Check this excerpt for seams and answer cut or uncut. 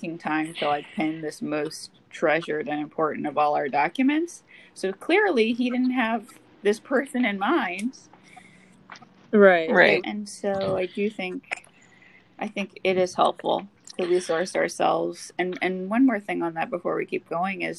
cut